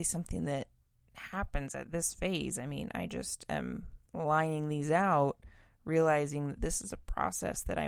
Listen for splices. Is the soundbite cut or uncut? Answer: cut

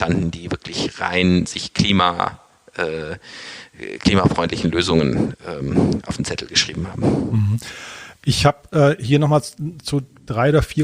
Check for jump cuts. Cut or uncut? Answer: uncut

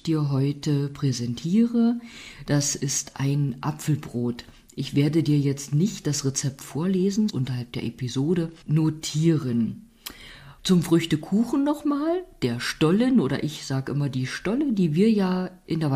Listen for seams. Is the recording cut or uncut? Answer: cut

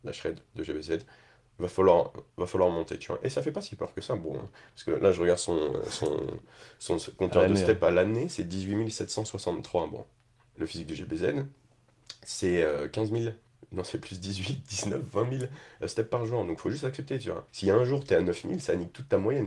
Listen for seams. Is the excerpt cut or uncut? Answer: cut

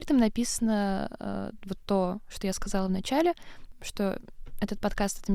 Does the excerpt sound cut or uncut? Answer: uncut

